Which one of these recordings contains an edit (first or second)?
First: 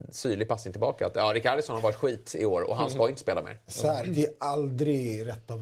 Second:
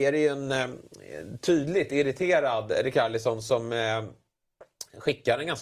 first